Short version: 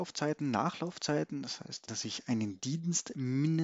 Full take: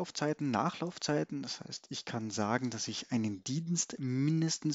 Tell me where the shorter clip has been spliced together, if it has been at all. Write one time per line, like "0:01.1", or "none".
0:01.9